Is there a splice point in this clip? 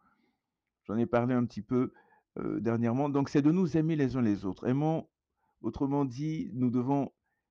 no; 0 cuts

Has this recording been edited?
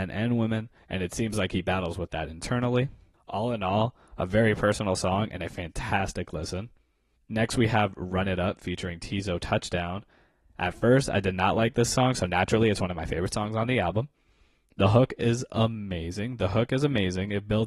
no; 0 cuts

